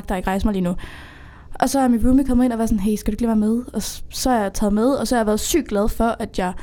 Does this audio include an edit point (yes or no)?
no